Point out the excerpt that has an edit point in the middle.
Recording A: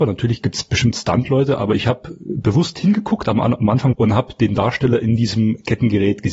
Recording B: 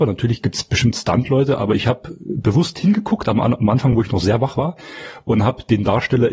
A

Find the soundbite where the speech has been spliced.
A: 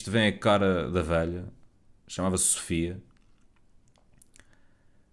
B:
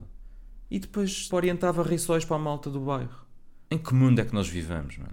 B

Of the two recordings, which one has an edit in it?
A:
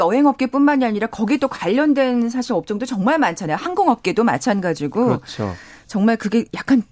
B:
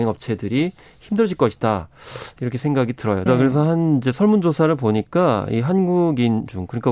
B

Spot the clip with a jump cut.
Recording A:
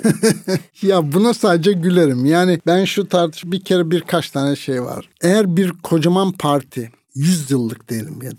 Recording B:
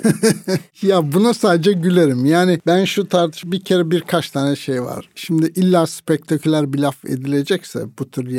A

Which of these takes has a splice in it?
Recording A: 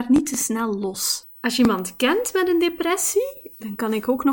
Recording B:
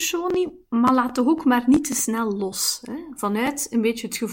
A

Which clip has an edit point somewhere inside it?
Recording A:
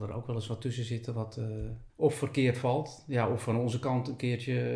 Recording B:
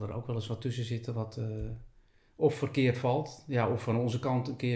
A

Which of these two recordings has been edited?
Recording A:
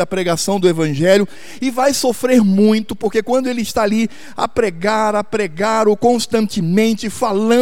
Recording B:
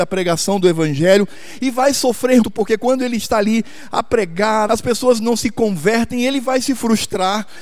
B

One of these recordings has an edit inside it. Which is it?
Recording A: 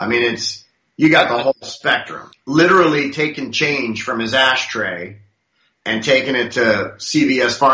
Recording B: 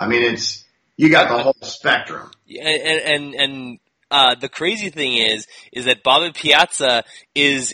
A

